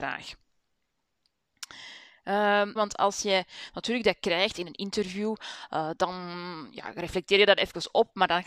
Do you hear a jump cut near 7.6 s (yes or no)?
no